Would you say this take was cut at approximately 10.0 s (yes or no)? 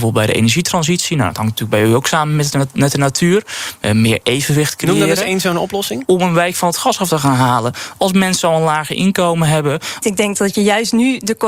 yes